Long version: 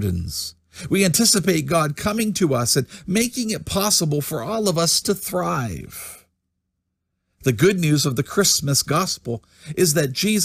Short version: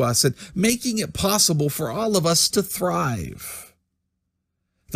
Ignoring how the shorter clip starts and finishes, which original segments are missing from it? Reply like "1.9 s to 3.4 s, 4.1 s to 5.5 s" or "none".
none